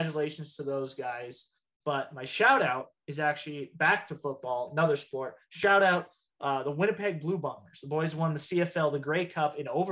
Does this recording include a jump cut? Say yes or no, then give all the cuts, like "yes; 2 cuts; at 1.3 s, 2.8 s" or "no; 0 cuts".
no; 0 cuts